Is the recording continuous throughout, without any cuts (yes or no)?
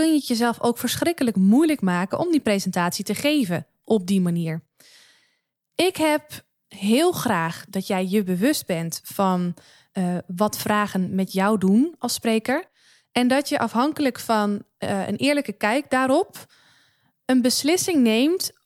yes